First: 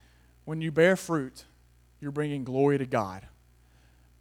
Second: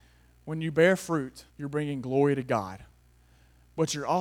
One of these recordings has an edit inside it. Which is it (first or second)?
second